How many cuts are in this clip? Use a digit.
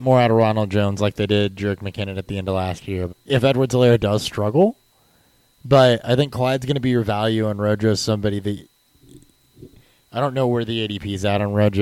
1